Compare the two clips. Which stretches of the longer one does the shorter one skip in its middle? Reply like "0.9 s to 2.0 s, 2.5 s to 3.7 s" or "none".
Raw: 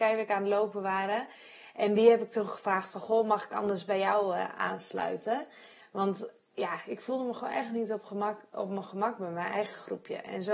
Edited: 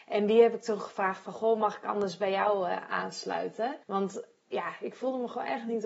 5.5 s to 5.9 s